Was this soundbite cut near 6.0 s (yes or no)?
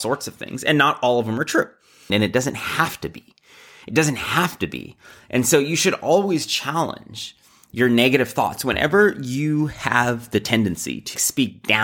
no